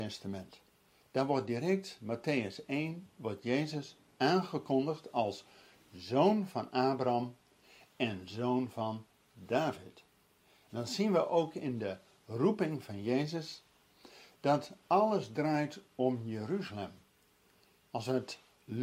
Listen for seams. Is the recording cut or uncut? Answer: uncut